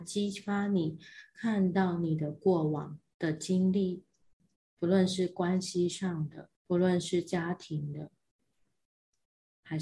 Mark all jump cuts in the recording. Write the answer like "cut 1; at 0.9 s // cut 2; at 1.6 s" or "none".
cut 1; at 4.7 s // cut 2; at 6.5 s